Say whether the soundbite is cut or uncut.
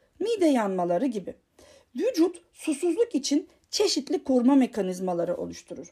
uncut